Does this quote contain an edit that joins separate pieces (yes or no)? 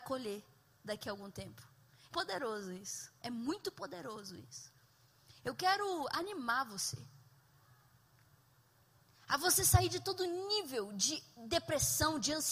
yes